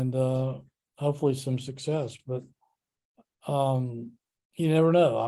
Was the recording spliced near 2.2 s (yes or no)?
no